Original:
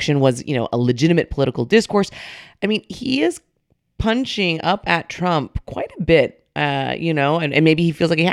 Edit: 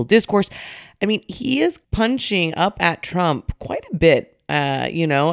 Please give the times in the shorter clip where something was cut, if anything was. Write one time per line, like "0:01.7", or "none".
0:01.8